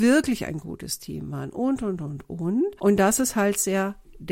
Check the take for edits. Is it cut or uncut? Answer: uncut